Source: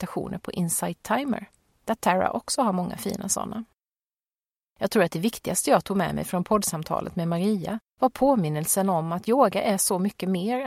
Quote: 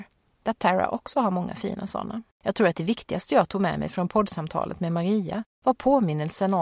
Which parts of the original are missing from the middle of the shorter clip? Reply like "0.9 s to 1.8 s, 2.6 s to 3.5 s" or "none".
3.7 s to 4.7 s